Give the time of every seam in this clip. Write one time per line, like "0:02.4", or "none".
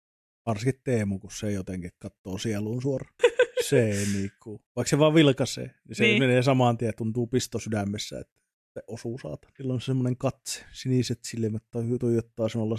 0:03.2
0:09.6